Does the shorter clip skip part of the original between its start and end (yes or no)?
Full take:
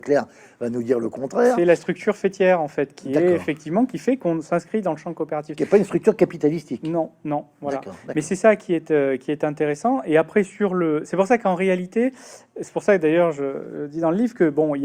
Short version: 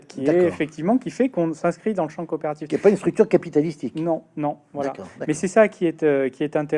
no